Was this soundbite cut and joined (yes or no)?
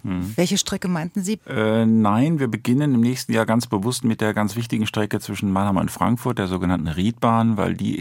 yes